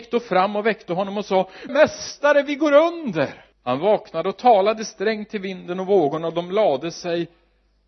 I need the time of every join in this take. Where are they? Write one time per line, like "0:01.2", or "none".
0:01.7
0:03.5